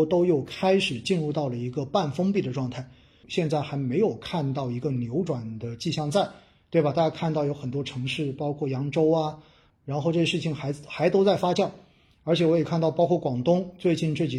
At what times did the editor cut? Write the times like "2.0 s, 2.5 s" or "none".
3.2 s, 9.7 s